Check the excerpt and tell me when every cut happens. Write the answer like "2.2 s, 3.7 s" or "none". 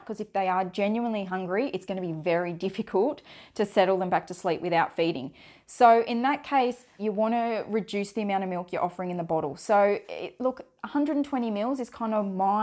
7.0 s